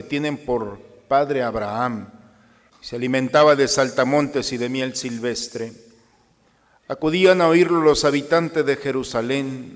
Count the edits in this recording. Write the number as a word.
one